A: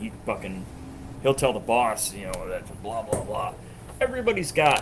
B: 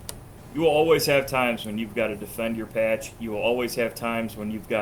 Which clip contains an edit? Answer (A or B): A